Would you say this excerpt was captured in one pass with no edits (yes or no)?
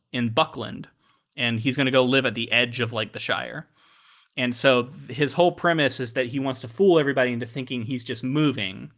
yes